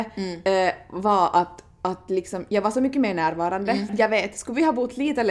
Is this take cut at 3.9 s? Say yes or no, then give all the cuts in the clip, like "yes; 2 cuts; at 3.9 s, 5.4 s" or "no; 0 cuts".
yes; 1 cut; at 3.9 s